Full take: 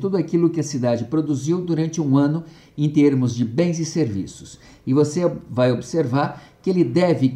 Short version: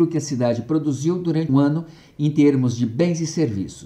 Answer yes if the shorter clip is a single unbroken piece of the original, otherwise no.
no